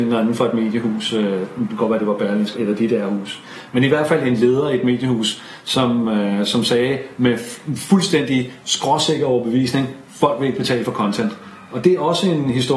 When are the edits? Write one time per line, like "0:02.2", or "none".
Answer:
0:02.5

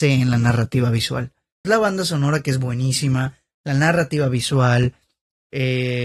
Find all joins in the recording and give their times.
0:01.6

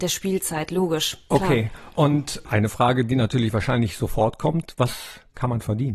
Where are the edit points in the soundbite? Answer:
none

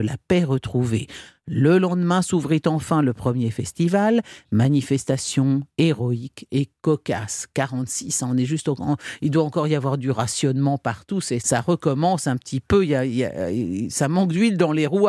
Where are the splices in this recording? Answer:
0:11.4

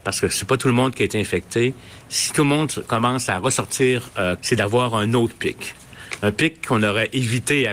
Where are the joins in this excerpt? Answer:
0:04.4

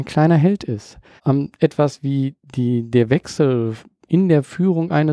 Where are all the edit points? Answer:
0:01.2

